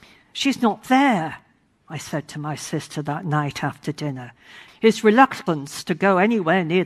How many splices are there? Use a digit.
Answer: 1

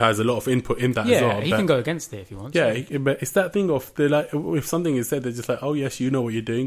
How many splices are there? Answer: 0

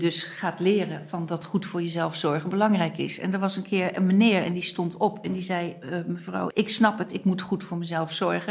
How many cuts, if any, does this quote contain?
1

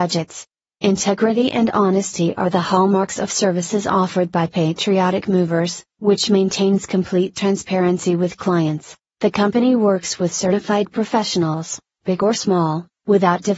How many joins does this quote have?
2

